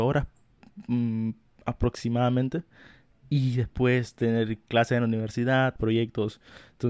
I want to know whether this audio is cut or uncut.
cut